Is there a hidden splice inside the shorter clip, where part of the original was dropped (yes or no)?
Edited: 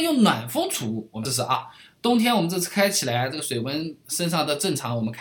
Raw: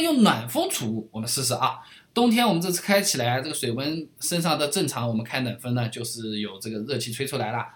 yes